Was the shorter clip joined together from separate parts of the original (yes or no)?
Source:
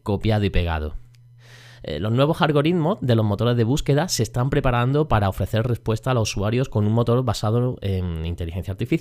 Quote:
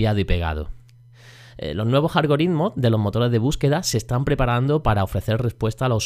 no